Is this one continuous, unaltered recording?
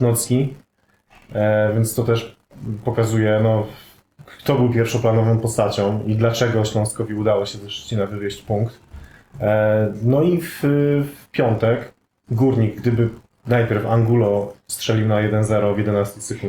yes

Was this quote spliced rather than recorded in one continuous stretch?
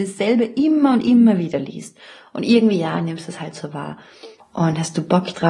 yes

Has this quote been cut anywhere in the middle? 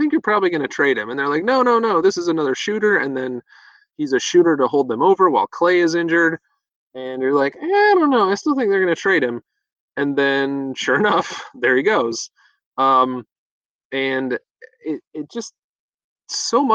no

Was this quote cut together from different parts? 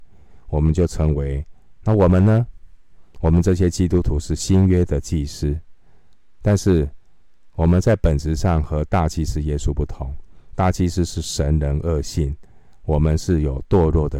yes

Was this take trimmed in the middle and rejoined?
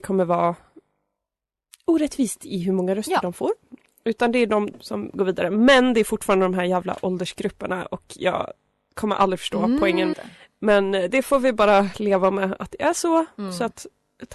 yes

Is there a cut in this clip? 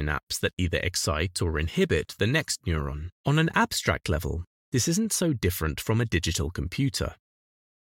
yes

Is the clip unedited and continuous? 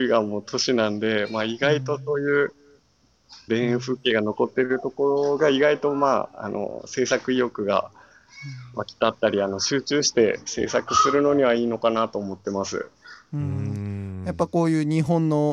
no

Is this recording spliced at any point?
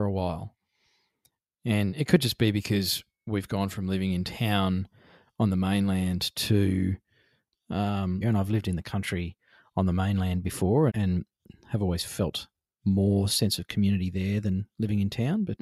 yes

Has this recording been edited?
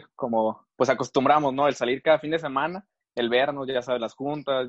no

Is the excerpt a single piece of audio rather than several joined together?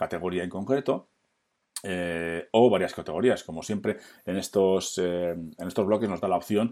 yes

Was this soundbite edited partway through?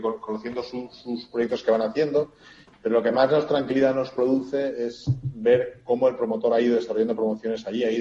yes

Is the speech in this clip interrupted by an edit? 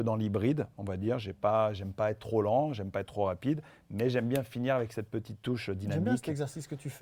no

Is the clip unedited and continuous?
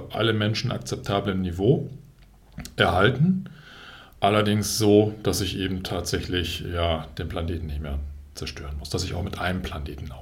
yes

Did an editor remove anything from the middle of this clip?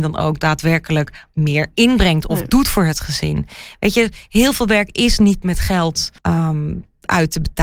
yes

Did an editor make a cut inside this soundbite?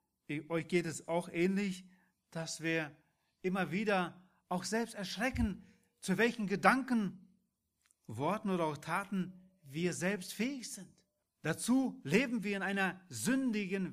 yes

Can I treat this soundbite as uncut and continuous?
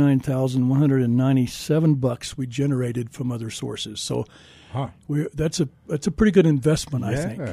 yes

